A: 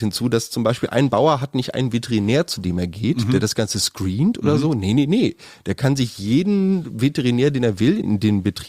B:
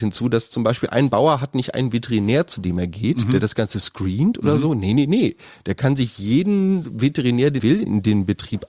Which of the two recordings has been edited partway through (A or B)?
B